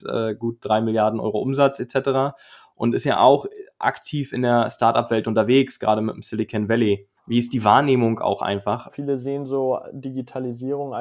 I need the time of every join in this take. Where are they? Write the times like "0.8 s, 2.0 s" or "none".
7.2 s, 8.9 s